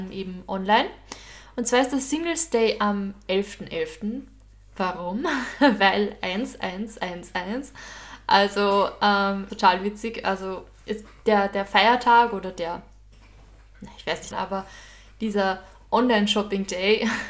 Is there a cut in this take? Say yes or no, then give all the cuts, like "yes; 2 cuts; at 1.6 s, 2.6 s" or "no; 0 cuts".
yes; 2 cuts; at 9.5 s, 14.3 s